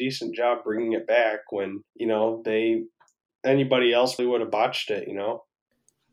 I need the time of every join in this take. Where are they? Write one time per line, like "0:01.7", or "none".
0:01.9
0:04.2